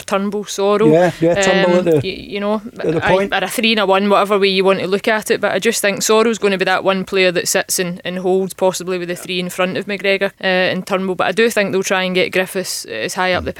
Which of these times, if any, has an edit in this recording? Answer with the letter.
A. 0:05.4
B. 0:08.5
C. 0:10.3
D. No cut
C